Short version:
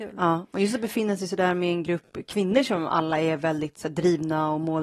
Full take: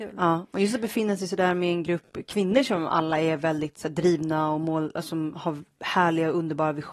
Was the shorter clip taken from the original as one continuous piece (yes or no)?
yes